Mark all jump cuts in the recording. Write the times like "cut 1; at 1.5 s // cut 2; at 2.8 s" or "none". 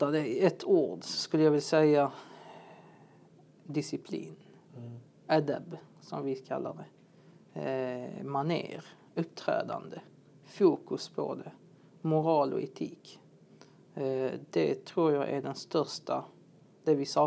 none

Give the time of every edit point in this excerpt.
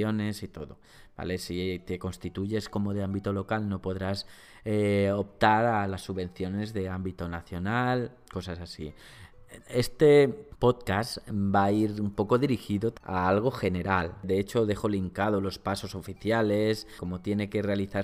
none

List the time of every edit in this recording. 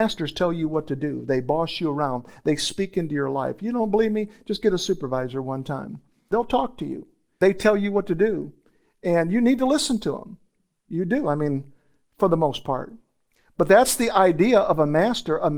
none

